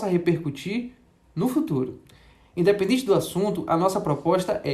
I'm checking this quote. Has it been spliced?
no; 0 cuts

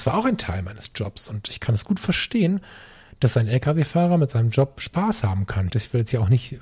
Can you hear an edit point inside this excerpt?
yes; 1 cut; at 5.7 s

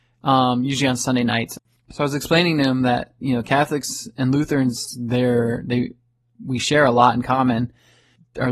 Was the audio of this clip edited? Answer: no; 0 cuts

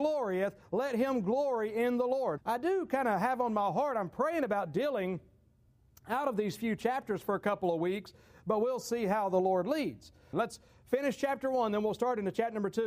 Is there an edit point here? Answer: yes; 2 cuts; at 2.4 s, 10.3 s

